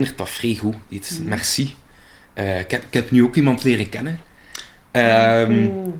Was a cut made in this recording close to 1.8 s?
no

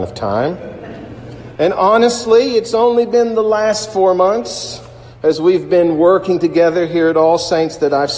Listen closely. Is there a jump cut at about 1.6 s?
no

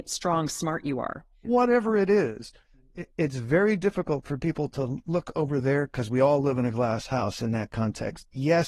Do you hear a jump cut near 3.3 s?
no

